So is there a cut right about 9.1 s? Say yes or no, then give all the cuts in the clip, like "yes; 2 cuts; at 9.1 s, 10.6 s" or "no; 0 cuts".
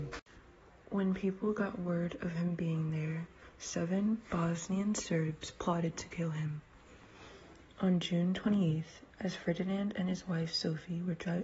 yes; 1 cut; at 9.1 s